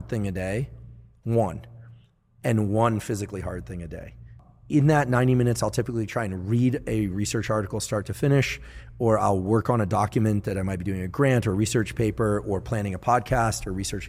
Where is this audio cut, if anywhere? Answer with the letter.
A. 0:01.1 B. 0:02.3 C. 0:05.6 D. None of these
D